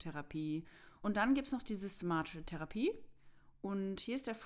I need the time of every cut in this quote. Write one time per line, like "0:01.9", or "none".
0:01.0